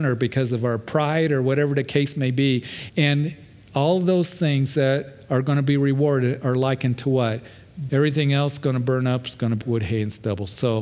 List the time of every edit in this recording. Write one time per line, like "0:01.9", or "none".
0:02.9
0:07.9
0:09.6

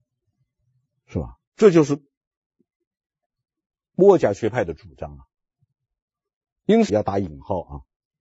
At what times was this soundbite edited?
0:01.5
0:06.9

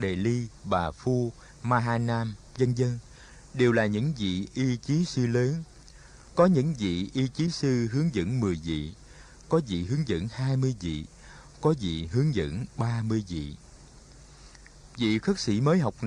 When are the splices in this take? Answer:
0:06.3

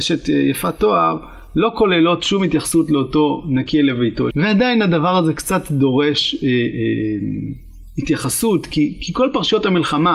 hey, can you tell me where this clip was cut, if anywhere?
0:04.3

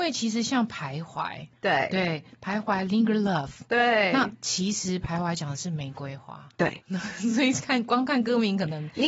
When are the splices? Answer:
none

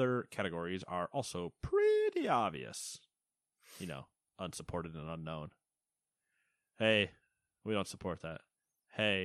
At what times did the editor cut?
none

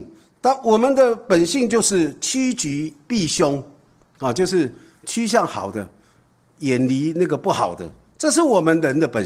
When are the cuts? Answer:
none

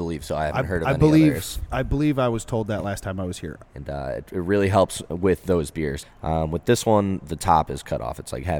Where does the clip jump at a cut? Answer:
0:03.6
0:06.0

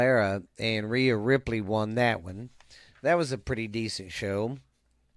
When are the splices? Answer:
none

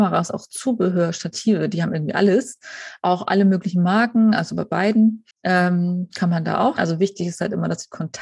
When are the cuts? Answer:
0:05.3
0:06.8

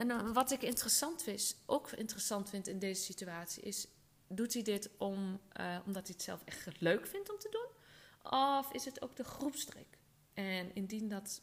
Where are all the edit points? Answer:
none

